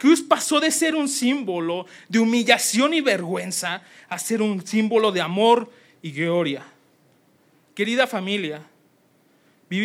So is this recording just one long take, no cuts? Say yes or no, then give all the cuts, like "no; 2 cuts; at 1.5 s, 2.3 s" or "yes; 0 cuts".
yes; 0 cuts